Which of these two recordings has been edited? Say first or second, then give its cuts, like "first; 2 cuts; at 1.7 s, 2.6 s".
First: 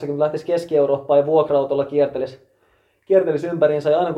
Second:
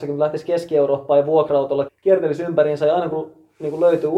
second; 1 cut; at 1.9 s